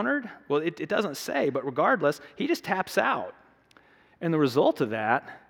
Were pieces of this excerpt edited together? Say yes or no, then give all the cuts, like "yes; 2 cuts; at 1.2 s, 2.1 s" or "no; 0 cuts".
no; 0 cuts